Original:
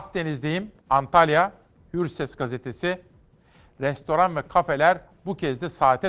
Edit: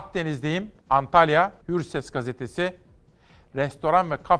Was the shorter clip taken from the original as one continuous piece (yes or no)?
no